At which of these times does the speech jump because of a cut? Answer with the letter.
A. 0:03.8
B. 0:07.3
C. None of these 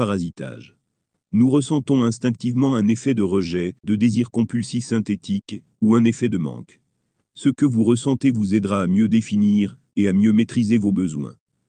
A